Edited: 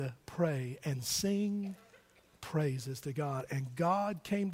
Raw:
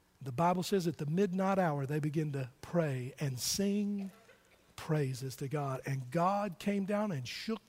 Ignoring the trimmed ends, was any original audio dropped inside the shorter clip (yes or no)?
no